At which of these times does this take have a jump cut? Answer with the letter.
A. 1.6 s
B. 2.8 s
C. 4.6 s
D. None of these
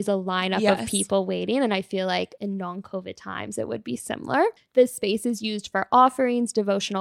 C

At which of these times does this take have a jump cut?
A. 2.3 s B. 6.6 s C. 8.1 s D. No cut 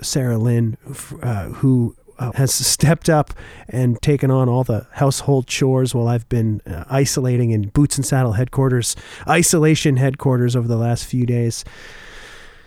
A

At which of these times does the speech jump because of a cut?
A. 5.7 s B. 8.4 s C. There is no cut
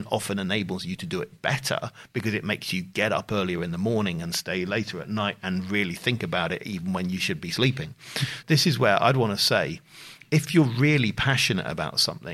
B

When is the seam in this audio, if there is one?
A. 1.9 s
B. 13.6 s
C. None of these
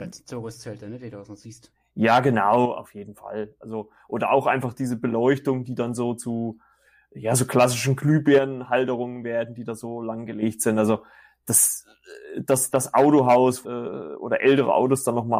B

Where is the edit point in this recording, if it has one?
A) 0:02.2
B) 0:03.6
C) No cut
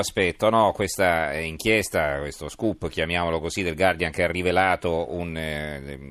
C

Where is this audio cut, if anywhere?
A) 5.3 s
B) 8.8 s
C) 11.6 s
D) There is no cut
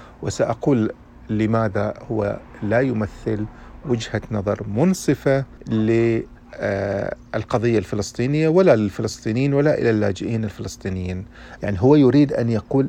C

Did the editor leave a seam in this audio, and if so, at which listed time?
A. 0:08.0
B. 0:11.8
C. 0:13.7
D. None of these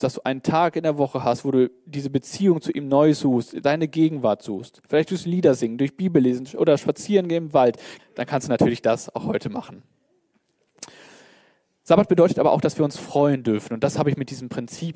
A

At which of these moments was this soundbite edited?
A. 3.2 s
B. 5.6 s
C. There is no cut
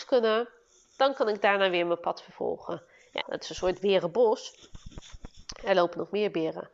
A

